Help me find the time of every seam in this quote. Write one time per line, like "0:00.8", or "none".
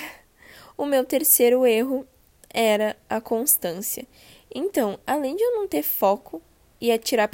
none